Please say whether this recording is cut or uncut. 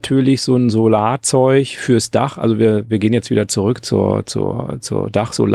uncut